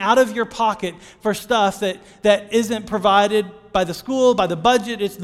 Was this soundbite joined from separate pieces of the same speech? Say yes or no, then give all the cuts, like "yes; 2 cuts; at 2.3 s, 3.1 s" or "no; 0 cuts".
no; 0 cuts